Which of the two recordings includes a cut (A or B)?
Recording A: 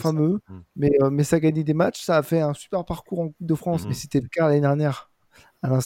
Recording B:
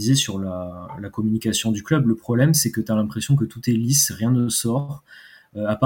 A